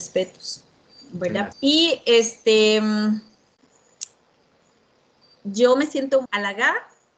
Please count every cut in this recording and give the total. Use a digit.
2